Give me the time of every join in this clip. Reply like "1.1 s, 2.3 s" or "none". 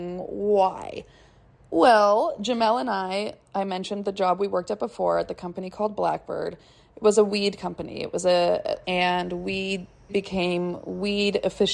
8.8 s, 10.1 s